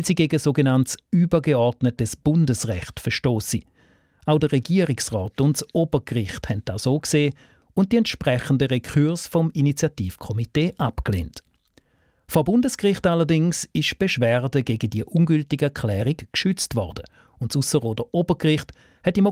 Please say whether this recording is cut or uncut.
cut